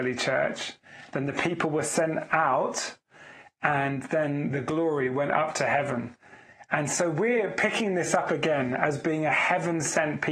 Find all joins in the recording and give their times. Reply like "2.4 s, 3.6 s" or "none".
none